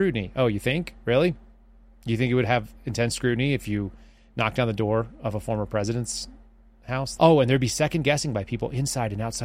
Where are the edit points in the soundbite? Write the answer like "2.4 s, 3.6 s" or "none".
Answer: 7.2 s